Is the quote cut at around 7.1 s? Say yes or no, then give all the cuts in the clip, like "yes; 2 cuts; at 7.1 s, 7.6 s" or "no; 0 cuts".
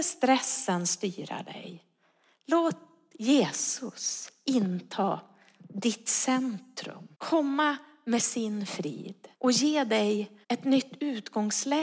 yes; 3 cuts; at 7.1 s, 9.3 s, 10.4 s